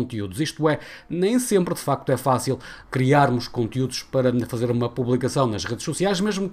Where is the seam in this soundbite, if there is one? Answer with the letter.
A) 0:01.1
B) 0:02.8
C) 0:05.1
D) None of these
B